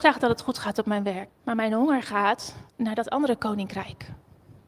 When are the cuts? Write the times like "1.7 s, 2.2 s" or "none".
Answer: 1.3 s, 2.7 s